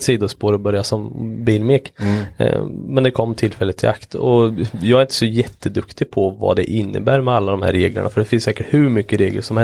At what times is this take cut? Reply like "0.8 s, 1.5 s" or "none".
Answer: none